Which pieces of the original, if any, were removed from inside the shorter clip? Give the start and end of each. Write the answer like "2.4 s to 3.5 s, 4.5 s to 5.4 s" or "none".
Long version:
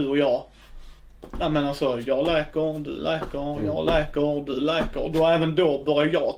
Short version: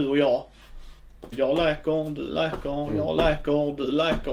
1.3 s to 2.0 s